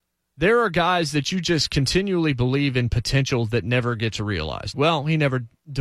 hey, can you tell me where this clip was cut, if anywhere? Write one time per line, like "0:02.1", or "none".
0:04.7